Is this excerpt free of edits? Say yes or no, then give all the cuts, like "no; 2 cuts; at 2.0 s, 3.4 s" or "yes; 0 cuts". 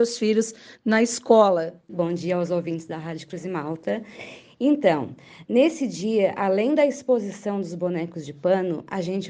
no; 1 cut; at 1.9 s